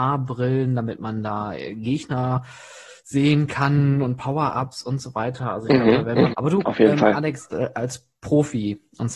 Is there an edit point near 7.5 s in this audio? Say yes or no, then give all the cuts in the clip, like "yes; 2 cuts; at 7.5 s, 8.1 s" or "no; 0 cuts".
yes; 2 cuts; at 6.3 s, 7.5 s